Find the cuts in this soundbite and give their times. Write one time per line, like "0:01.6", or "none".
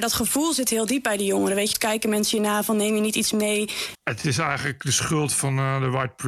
0:01.7
0:03.9